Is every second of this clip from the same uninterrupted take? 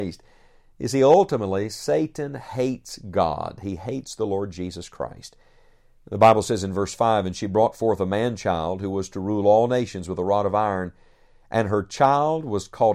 yes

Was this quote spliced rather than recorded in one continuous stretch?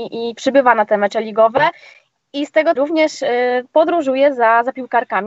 yes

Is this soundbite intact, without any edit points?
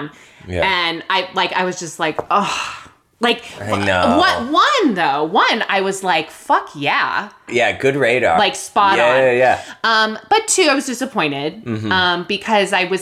no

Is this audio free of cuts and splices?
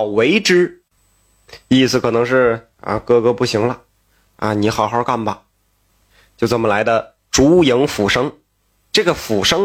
yes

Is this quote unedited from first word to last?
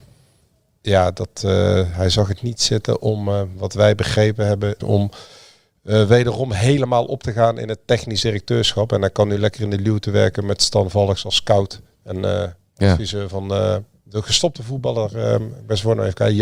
no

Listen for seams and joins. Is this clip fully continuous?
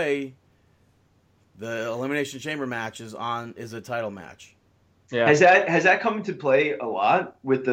yes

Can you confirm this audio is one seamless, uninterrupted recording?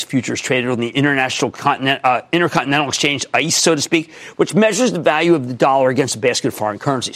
yes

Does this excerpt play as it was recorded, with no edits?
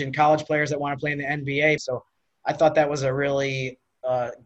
no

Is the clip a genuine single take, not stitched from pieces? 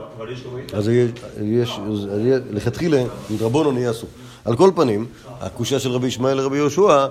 yes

